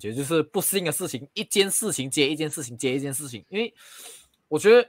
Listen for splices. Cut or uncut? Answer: uncut